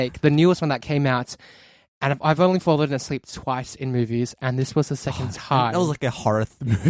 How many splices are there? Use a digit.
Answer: 1